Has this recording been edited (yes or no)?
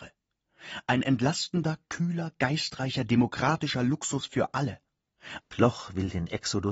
yes